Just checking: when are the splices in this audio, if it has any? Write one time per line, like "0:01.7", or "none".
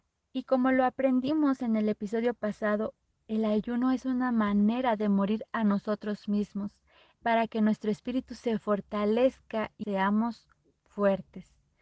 0:07.1
0:09.8